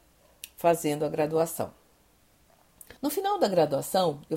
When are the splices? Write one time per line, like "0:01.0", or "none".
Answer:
0:03.0